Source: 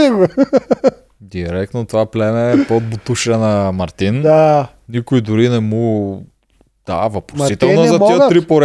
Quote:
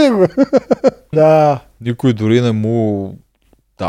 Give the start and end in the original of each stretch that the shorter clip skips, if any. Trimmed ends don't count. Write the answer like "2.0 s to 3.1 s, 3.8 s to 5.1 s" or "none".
1.1 s to 4.2 s